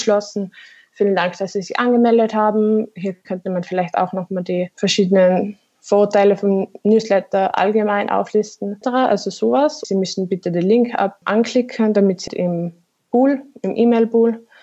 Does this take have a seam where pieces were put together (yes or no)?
yes